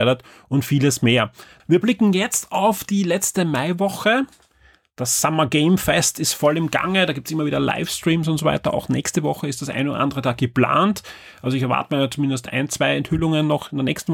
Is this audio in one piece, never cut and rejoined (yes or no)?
no